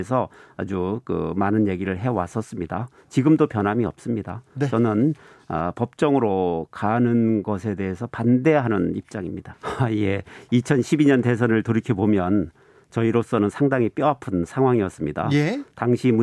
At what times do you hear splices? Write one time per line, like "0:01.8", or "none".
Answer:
0:09.5